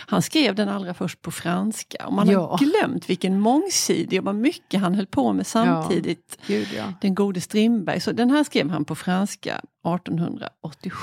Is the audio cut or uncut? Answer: uncut